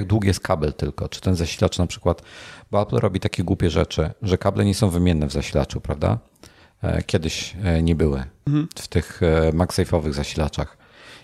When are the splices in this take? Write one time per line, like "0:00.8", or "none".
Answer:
none